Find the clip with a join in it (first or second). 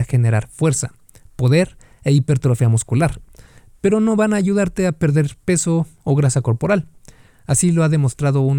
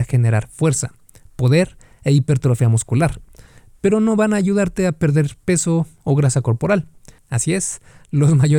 second